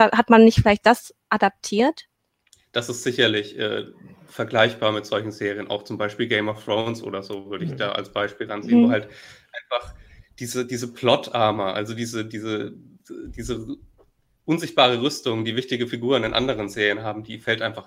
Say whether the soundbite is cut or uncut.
uncut